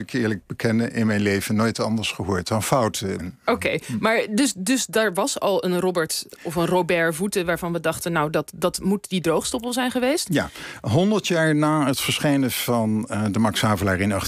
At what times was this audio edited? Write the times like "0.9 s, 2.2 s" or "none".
3.2 s